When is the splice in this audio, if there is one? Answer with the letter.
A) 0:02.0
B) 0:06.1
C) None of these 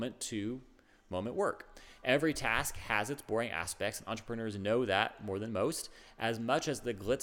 C